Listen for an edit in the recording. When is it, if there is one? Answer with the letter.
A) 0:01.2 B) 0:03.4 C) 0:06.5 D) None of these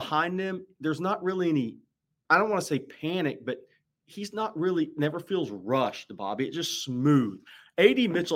D